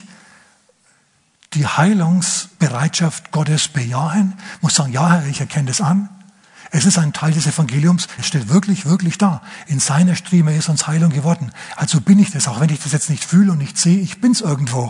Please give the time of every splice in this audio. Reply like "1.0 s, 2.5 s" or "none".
8.2 s